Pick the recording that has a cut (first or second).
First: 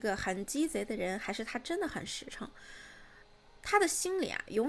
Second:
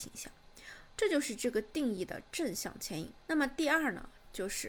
second